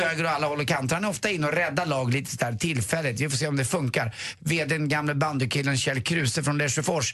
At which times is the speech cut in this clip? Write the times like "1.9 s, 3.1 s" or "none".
none